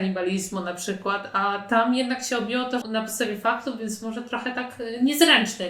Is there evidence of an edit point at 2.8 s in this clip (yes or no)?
yes